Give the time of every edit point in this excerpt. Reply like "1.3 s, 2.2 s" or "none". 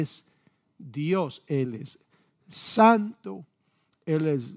none